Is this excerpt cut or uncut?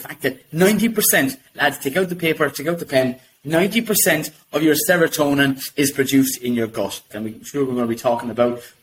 cut